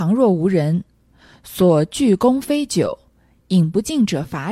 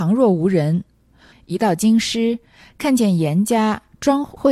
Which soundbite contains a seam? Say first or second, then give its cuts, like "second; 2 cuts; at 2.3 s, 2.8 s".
second; 1 cut; at 1.3 s